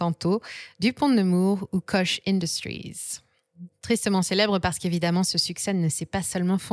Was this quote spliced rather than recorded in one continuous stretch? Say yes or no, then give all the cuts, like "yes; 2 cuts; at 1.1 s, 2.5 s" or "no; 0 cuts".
no; 0 cuts